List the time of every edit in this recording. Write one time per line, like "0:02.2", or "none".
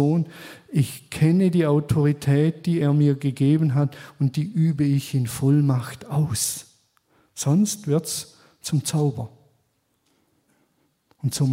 none